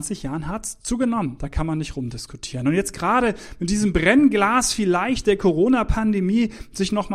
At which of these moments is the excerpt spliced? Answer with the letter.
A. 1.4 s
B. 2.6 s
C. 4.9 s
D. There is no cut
A